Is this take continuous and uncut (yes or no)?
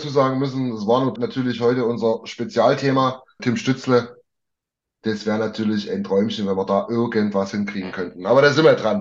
no